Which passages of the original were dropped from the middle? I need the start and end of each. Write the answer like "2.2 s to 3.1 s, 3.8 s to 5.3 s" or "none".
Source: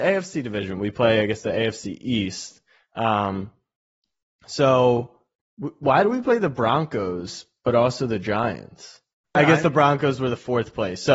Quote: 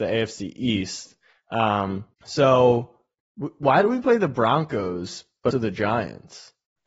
3.6 s to 4.3 s, 7.7 s to 8.0 s

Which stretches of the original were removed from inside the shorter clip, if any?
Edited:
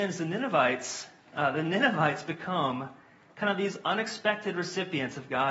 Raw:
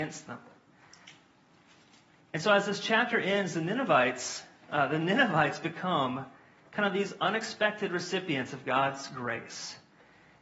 none

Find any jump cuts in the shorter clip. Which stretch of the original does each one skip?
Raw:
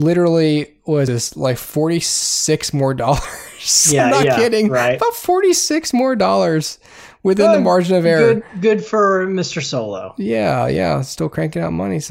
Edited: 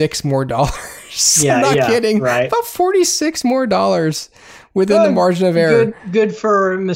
none

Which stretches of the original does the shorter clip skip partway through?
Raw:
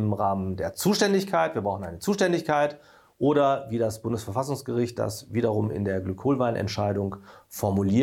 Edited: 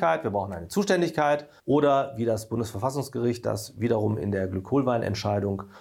2.9 s to 3.1 s

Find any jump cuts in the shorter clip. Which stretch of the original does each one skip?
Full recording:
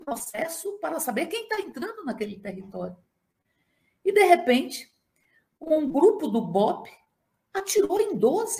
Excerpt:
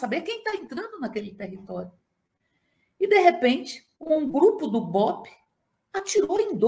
5.0 s to 5.6 s

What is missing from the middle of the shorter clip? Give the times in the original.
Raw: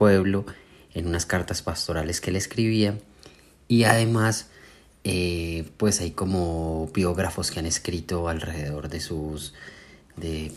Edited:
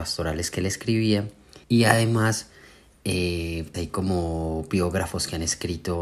3.3 s to 3.6 s, 5.7 s to 6.0 s

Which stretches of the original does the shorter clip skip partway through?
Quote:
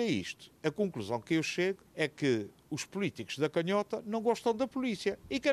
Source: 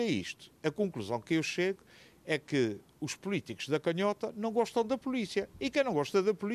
1.9 s to 2.2 s

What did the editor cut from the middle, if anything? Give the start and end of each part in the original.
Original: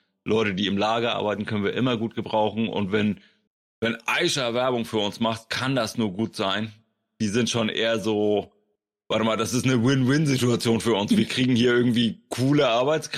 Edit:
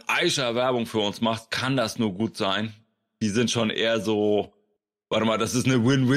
none

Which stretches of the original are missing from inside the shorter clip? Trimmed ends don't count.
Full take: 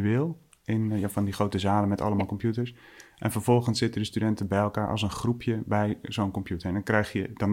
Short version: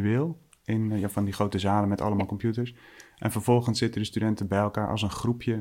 none

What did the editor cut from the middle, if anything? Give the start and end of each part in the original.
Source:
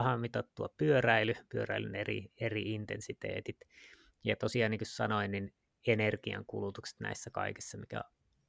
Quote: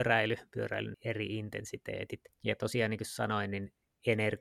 1.9 s to 2.3 s, 3.7 s to 4.1 s

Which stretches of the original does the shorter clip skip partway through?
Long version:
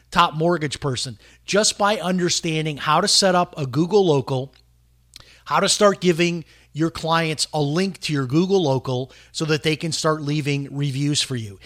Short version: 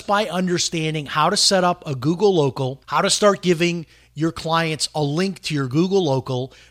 4.5 s to 5.4 s

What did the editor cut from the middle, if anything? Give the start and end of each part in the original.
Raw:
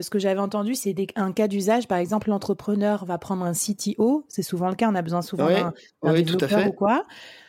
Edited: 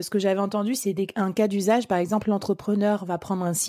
none

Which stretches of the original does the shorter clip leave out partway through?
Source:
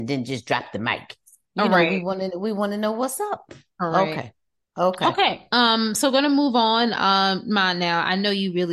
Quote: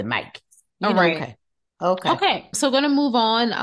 1.9 s to 4.1 s, 5.5 s to 5.9 s

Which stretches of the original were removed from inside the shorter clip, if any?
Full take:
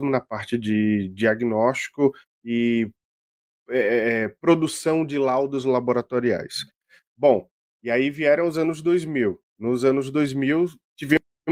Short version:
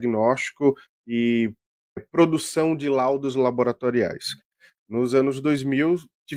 3.3 s to 4.3 s, 7.1 s to 9.5 s

